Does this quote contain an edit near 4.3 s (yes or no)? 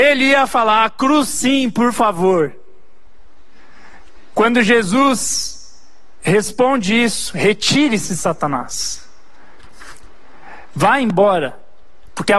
yes